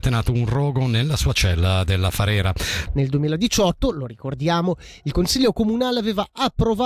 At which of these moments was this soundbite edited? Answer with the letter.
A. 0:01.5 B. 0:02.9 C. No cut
B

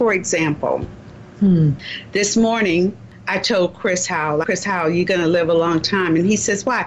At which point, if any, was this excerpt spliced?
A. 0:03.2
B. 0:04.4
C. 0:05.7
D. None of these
B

